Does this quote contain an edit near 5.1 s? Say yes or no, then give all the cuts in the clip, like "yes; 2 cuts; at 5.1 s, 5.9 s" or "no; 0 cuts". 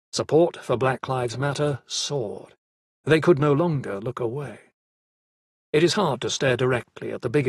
no; 1 cut; at 2.9 s